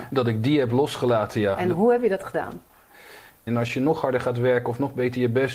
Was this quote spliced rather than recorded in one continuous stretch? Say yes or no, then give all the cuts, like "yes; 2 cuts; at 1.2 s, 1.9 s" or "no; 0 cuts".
yes; 1 cut; at 3.5 s